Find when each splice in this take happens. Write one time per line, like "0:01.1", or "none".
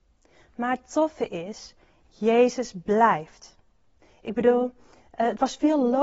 none